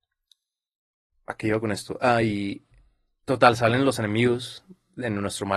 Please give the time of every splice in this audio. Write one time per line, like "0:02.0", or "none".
none

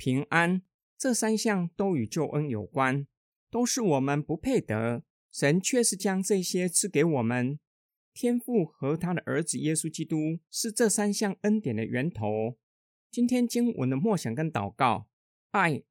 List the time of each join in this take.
0:12.9

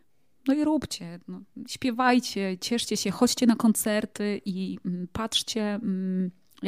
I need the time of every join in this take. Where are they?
none

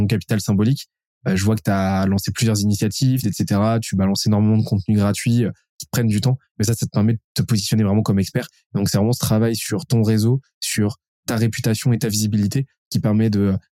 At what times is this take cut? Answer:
0:03.2

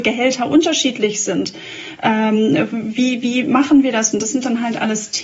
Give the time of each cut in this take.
0:04.1

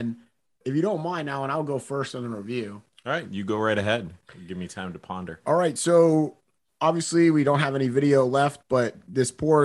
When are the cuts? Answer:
none

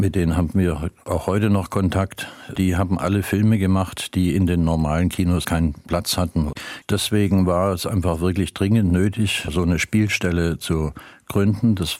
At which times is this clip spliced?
0:05.4

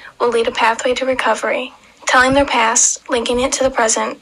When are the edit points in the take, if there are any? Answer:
none

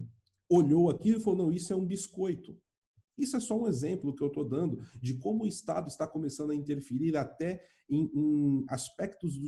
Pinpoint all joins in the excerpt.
none

